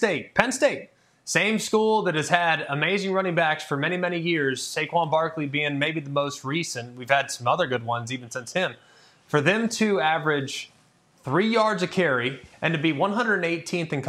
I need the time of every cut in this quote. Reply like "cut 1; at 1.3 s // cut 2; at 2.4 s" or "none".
none